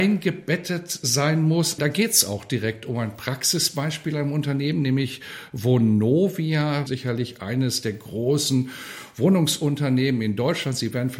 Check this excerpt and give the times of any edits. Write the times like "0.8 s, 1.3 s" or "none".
1.8 s, 6.9 s